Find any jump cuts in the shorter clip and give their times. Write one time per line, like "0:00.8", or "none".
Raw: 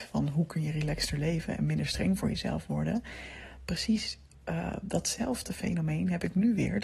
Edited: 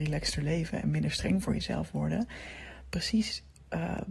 none